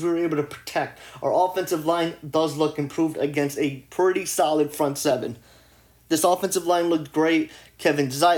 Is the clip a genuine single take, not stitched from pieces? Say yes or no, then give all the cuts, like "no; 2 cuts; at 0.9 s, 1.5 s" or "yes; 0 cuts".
yes; 0 cuts